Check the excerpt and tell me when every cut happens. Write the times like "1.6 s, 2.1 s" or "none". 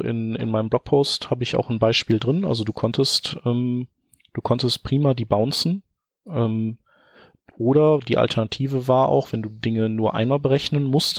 none